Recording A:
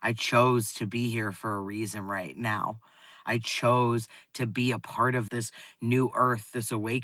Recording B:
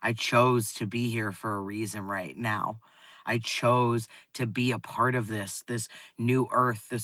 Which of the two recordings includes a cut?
A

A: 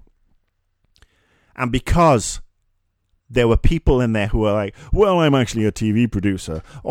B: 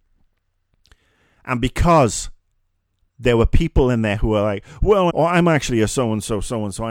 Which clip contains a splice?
B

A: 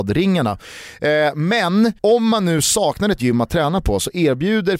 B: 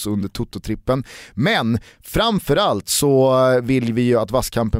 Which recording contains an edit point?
A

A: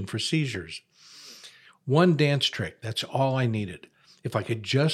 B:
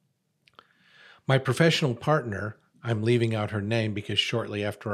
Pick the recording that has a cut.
A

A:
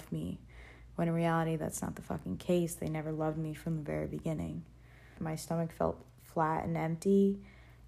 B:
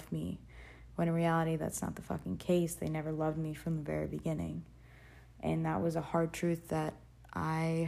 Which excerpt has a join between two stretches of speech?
A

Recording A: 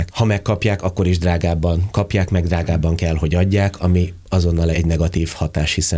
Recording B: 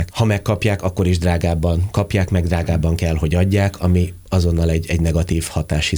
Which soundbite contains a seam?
A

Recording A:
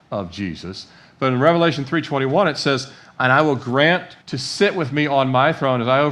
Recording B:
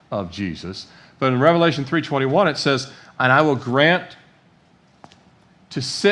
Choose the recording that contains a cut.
A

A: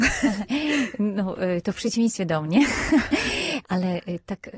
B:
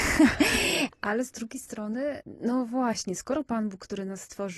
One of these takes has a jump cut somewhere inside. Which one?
B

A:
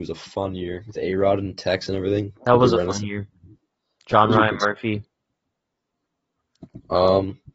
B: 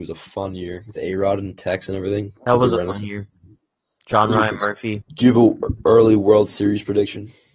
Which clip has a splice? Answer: B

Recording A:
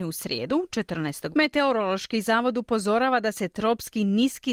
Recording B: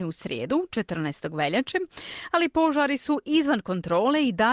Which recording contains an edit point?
A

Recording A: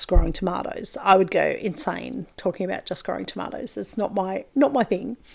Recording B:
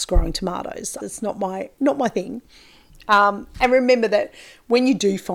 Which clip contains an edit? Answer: B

